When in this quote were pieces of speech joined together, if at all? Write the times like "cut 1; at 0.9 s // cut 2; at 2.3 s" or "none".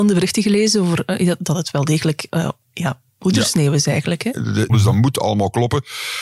cut 1; at 4.7 s

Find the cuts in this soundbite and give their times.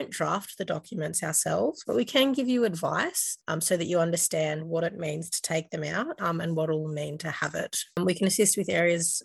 cut 1; at 1.8 s // cut 2; at 6.2 s

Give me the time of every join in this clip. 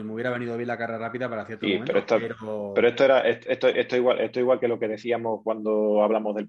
none

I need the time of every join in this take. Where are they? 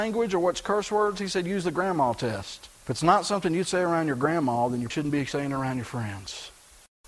cut 1; at 2.7 s // cut 2; at 4.9 s

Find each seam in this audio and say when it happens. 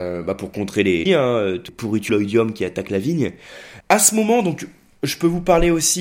cut 1; at 1.1 s // cut 2; at 2.1 s // cut 3; at 3.8 s

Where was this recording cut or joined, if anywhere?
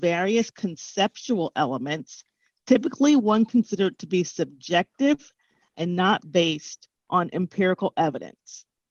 none

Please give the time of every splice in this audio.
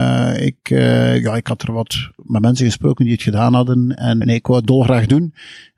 cut 1; at 4.2 s

